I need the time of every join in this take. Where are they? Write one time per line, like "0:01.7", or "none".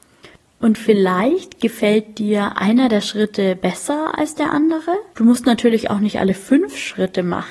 0:05.1